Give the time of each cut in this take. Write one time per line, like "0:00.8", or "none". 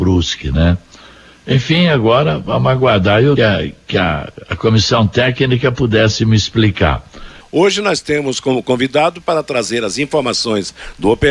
0:03.4
0:07.4